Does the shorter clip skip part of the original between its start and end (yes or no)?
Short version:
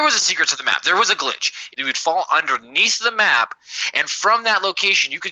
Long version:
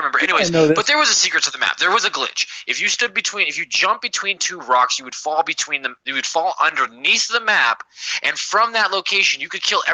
yes